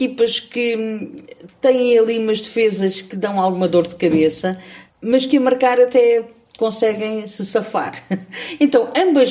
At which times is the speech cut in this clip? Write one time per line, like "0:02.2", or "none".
0:04.9

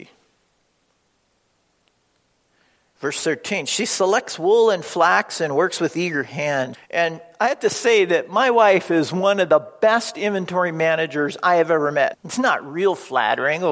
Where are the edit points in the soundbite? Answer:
0:06.7
0:12.1

